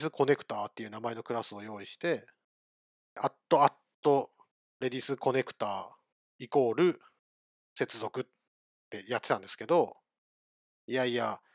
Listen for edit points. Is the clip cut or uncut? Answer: uncut